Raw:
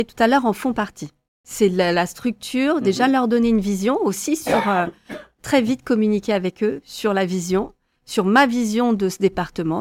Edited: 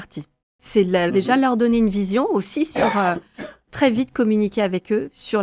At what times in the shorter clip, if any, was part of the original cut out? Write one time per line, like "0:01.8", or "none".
0:01.1